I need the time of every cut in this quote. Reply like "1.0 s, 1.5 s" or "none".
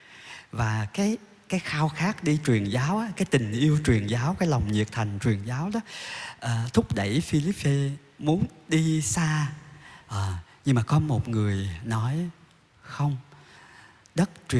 none